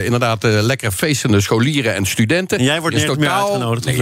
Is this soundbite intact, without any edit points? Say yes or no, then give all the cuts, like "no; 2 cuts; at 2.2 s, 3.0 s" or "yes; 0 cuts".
yes; 0 cuts